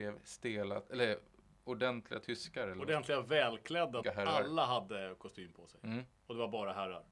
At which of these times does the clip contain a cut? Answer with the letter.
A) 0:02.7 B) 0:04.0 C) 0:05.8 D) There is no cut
B